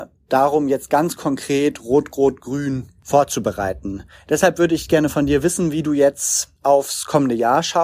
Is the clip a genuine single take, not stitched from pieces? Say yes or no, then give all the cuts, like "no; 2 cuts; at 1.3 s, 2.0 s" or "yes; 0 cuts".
yes; 0 cuts